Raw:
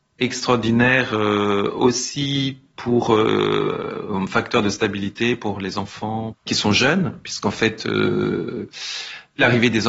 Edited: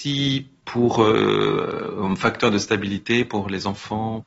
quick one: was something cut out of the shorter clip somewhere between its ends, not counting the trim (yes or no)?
no